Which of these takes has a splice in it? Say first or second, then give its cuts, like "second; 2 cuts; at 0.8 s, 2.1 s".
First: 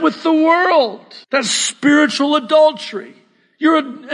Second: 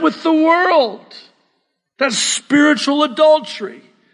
first; 1 cut; at 1.2 s